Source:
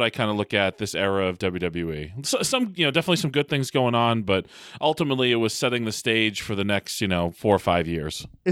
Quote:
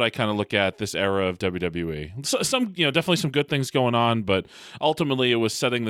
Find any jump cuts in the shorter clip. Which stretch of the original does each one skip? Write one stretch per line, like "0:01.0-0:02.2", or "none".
none